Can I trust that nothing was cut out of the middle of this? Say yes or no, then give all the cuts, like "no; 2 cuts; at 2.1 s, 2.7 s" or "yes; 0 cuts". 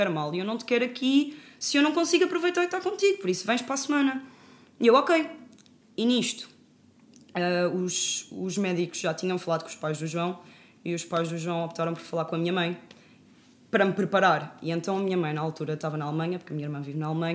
yes; 0 cuts